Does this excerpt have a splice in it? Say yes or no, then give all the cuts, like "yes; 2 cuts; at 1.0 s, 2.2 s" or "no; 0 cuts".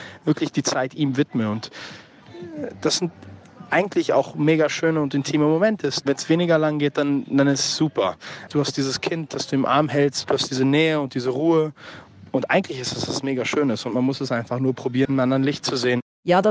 yes; 3 cuts; at 6.0 s, 8.5 s, 15.1 s